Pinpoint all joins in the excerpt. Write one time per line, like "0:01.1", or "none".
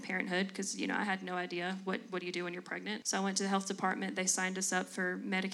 0:03.0

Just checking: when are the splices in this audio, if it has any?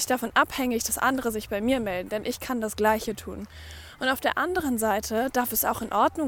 none

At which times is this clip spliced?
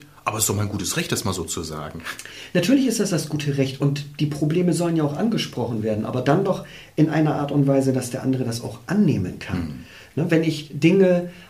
none

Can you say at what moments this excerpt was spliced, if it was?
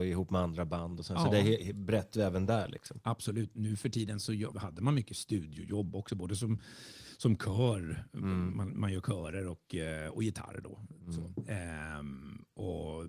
0:04.5

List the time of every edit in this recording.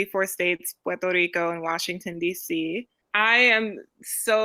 0:03.0

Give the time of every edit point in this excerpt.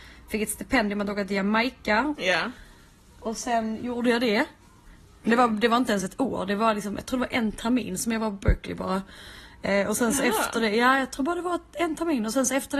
0:02.2
0:05.2

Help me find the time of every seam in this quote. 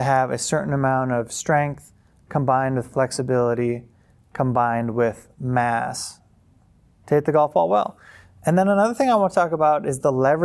none

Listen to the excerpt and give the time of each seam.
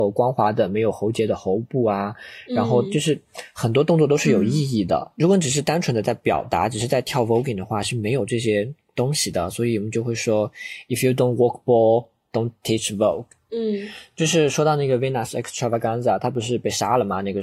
none

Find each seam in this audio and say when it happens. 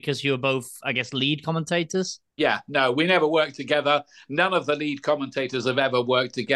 0:02.3

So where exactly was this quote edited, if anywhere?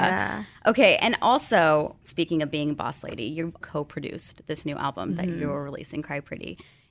none

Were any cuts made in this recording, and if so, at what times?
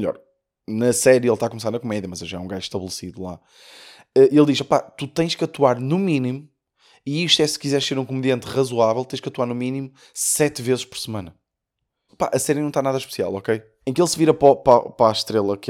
0:12.1
0:13.8

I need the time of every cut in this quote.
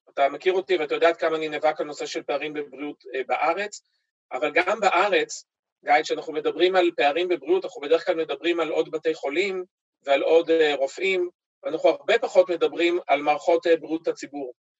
none

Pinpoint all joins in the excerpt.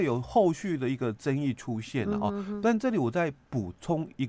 none

